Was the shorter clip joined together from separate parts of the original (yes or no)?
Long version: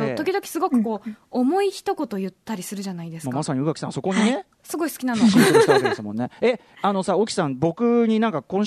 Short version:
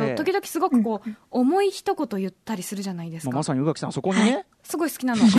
no